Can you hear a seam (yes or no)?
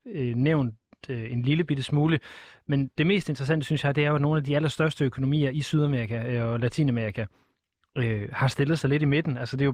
no